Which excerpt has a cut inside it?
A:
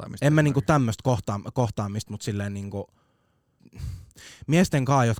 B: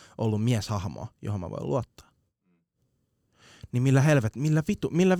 A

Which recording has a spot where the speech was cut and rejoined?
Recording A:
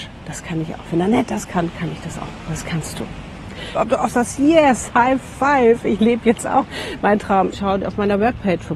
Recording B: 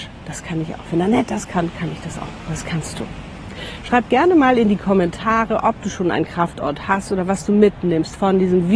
A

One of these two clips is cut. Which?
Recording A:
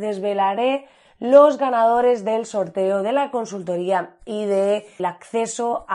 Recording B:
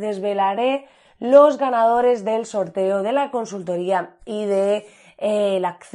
A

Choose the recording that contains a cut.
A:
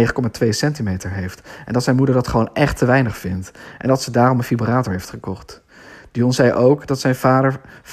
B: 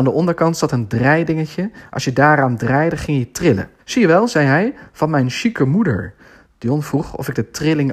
B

